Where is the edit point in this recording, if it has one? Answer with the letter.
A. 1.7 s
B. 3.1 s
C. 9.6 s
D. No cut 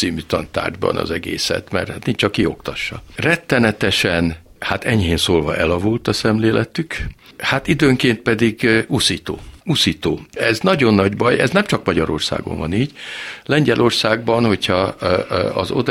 C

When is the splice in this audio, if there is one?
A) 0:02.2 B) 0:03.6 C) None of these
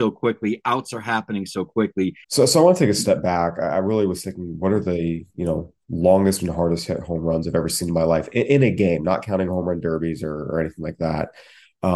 A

